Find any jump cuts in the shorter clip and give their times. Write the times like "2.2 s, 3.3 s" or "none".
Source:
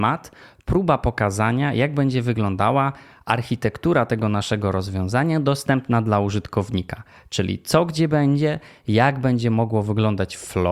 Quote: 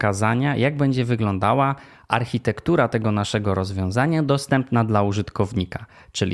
none